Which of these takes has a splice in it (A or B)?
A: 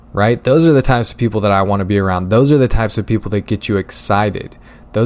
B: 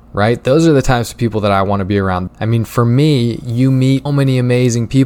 B